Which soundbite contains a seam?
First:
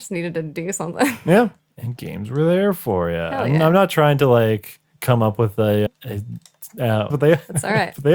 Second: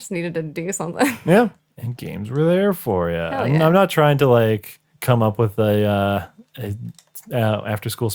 first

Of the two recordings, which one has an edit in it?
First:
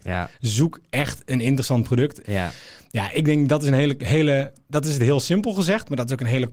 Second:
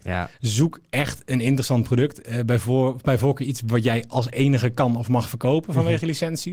first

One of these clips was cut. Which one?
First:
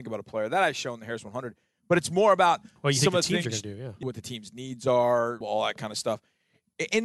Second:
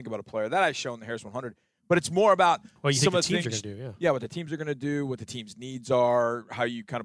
first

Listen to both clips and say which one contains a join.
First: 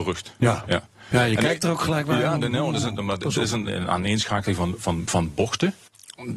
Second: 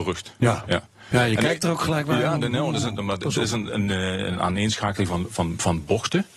first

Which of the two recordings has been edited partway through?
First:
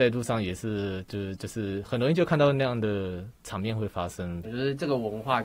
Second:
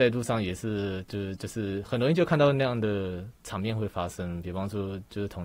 first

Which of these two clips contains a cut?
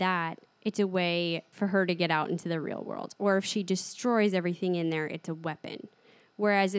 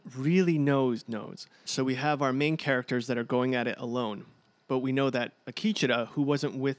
second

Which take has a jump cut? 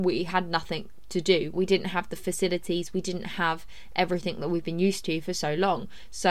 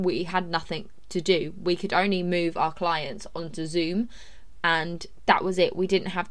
first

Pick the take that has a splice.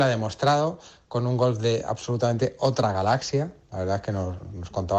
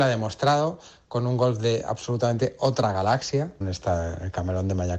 second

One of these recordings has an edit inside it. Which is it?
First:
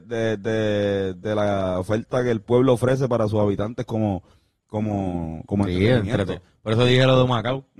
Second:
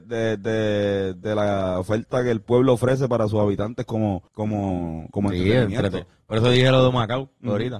second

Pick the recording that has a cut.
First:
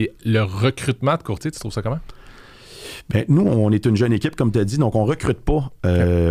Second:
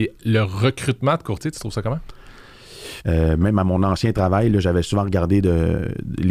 second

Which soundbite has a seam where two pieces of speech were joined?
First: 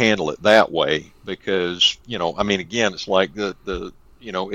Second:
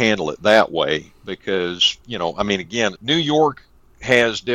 second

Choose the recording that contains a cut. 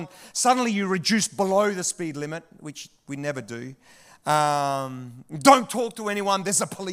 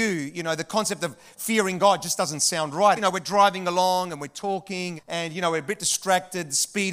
second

